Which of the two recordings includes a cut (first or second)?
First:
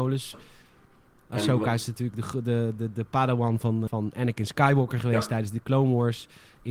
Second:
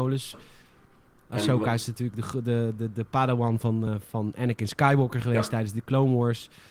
first